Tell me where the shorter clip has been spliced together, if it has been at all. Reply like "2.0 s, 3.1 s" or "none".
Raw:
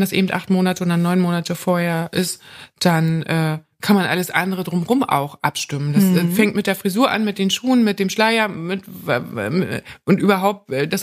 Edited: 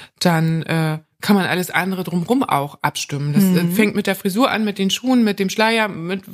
none